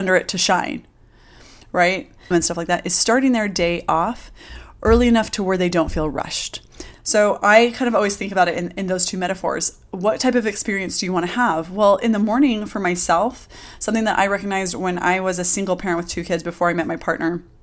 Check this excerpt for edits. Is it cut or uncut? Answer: cut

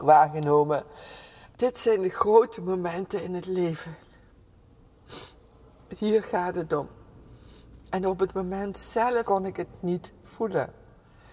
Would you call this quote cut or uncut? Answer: cut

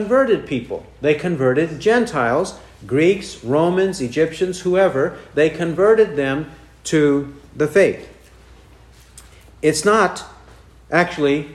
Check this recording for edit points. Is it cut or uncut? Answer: uncut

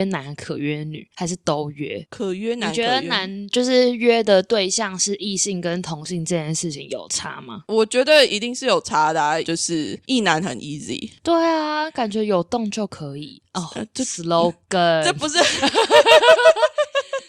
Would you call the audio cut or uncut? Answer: cut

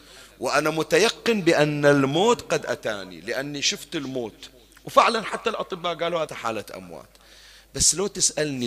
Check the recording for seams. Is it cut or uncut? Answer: cut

